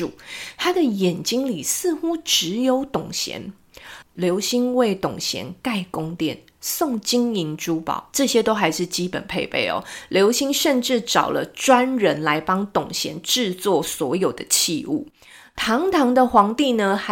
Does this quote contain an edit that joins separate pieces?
yes; 1 cut; at 4.0 s

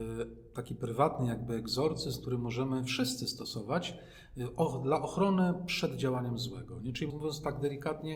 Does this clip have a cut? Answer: yes; 1 cut; at 7.1 s

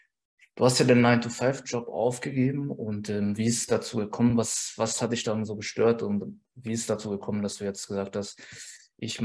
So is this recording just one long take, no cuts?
yes; 0 cuts

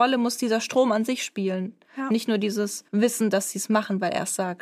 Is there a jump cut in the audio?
yes; 1 cut; at 2.9 s

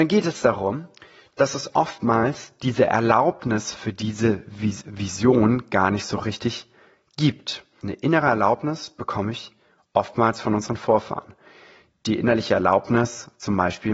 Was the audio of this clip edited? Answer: yes; 1 cut; at 7.8 s

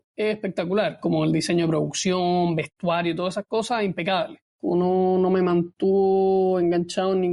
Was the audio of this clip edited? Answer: yes; 1 cut; at 4.4 s

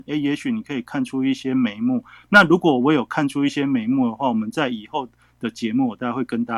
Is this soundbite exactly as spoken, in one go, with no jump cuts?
yes; 0 cuts

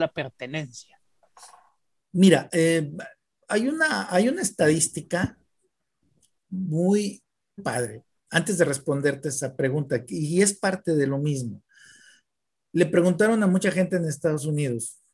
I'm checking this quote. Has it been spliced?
yes; 1 cut; at 7.6 s

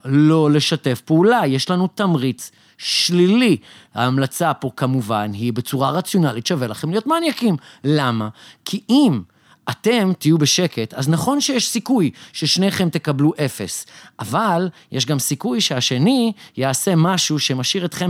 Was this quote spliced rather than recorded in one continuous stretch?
no; 0 cuts

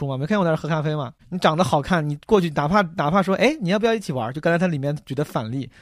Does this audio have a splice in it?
yes; 1 cut; at 1.2 s

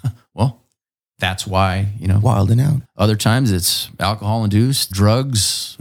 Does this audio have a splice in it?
yes; 2 cuts; at 2.8 s, 4.9 s

